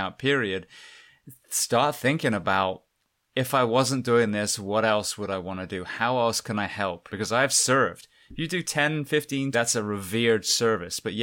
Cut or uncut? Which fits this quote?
cut